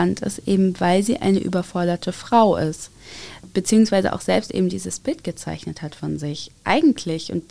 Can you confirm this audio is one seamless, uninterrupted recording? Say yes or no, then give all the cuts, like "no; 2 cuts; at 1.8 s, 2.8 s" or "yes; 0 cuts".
yes; 0 cuts